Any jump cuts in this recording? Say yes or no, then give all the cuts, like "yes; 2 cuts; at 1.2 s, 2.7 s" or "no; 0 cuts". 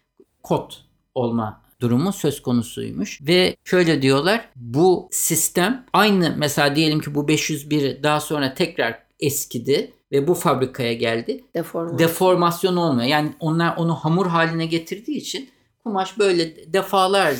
yes; 2 cuts; at 10.0 s, 11.5 s